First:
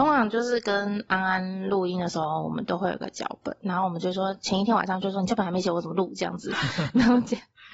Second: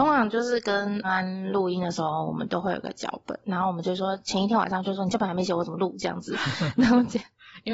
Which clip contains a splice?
second; 1 cut; at 1.0 s

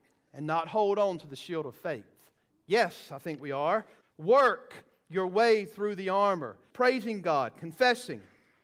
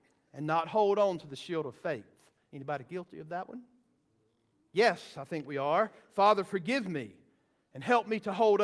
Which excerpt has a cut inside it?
first; 3 cuts; at 2.5 s, 4.0 s, 6.7 s

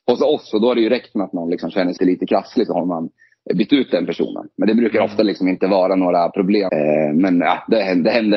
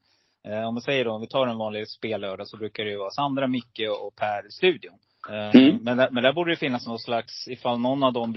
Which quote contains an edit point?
first; 2 cuts; at 2.0 s, 6.7 s

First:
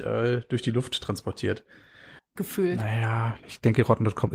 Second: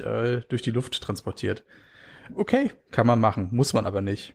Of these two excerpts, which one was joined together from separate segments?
first; 2 cuts; at 2.2 s, 3.4 s

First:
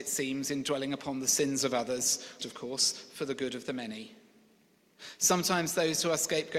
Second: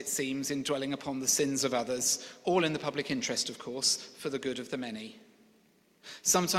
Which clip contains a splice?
first; 1 cut; at 2.4 s

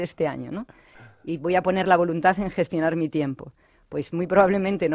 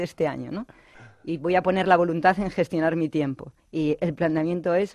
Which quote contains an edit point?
second; 1 cut; at 3.6 s

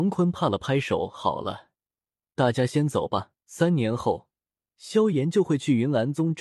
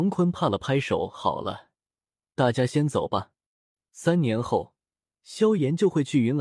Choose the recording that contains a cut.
first; 1 cut; at 3.4 s

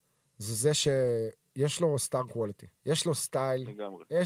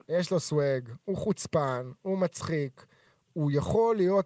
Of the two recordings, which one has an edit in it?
first; 1 cut; at 2.8 s

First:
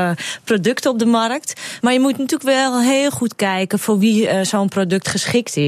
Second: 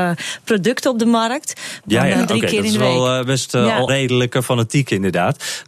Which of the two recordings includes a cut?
second; 2 cuts; at 1.8 s, 3.9 s

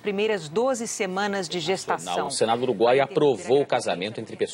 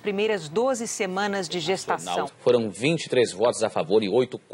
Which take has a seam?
second; 1 cut; at 2.3 s

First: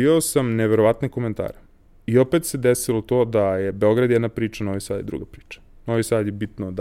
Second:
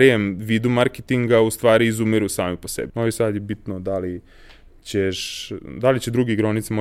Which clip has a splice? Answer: second; 1 cut; at 2.9 s

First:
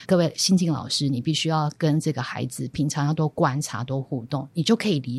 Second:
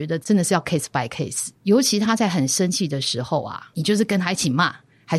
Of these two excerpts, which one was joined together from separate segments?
second; 1 cut; at 3.7 s

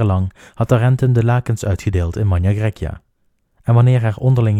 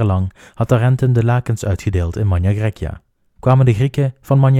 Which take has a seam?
second; 1 cut; at 3.4 s

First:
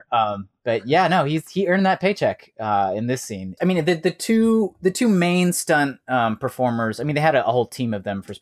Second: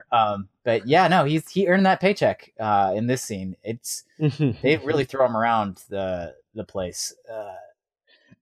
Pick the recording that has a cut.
first; 1 cut; at 3.6 s

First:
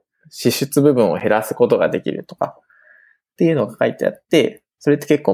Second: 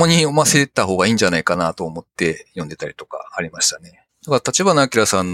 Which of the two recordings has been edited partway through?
second; 1 cut; at 4.1 s

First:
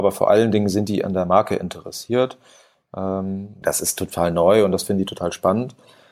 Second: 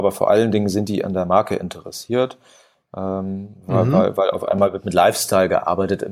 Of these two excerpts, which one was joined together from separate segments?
first; 1 cut; at 3.6 s

